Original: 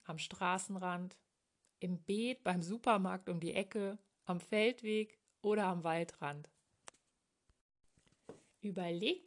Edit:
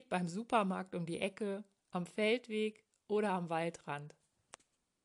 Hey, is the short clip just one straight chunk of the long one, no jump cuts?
yes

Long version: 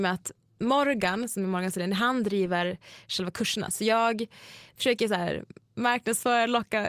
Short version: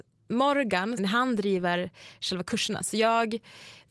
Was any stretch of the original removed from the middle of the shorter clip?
yes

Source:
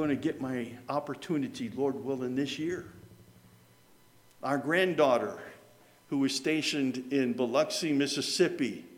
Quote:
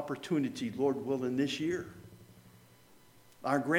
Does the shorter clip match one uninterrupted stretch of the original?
yes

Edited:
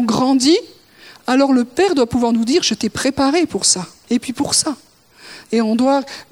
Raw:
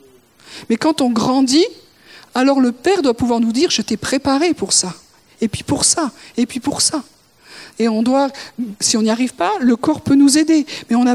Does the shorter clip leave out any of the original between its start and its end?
yes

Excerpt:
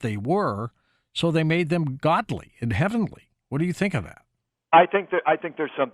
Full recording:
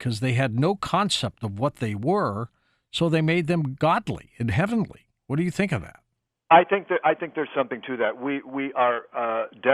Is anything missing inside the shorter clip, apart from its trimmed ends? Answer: no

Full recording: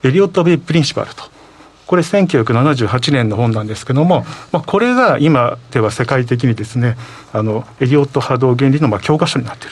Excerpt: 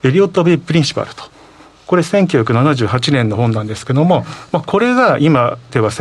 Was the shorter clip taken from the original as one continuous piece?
yes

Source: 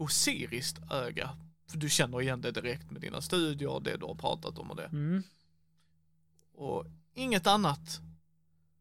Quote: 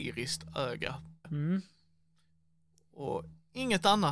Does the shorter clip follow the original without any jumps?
no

